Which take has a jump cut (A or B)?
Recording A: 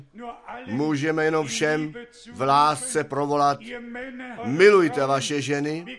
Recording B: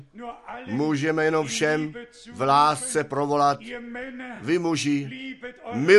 A